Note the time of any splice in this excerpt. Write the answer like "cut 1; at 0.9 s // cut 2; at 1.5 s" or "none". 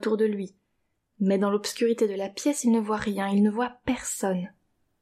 none